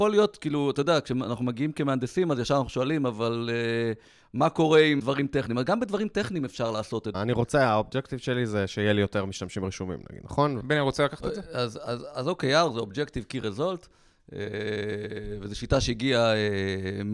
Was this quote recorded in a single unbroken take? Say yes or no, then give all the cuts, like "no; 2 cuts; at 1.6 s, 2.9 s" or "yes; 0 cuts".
no; 3 cuts; at 5.0 s, 7.1 s, 10.6 s